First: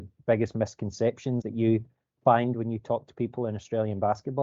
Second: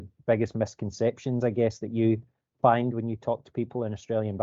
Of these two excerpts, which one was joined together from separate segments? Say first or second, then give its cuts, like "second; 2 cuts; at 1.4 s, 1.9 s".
first; 1 cut; at 1.4 s